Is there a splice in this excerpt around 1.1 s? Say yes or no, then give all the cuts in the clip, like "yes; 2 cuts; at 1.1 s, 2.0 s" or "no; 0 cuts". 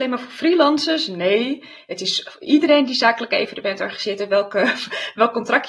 no; 0 cuts